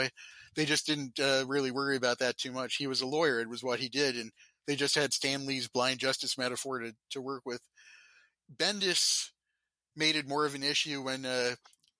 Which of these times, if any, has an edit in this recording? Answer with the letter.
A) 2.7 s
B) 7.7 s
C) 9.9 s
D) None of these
C